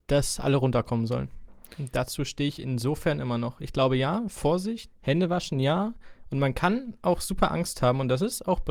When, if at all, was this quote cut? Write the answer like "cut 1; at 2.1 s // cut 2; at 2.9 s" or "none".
cut 1; at 4.9 s